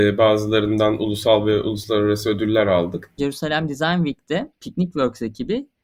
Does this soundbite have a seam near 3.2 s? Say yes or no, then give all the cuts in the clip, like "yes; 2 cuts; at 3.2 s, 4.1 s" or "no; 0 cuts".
yes; 1 cut; at 3.2 s